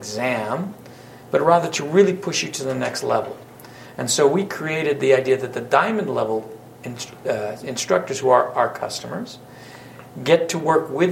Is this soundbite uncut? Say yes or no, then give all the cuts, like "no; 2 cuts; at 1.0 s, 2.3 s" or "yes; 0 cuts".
yes; 0 cuts